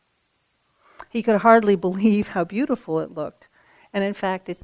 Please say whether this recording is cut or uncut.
uncut